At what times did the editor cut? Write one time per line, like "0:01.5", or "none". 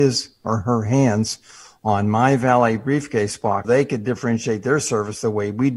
0:03.6